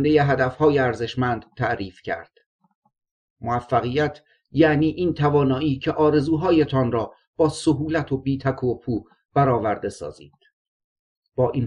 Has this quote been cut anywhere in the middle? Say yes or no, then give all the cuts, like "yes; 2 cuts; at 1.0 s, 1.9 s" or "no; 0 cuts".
no; 0 cuts